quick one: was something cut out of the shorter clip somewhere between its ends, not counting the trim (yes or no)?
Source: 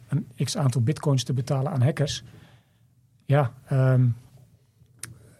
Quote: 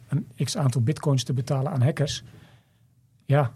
no